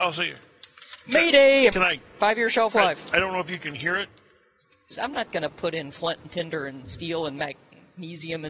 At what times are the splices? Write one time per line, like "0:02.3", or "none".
0:01.7
0:04.9